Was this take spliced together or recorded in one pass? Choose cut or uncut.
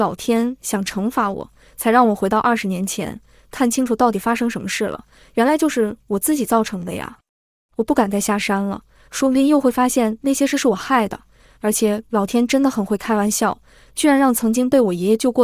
uncut